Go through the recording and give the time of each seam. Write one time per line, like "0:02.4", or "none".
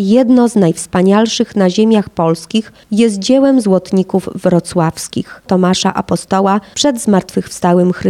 0:05.5